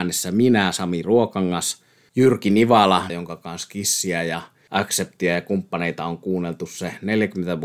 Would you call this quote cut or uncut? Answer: cut